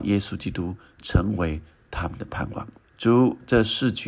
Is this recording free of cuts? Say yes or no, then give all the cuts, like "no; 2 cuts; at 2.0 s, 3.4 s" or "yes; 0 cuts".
no; 1 cut; at 2.8 s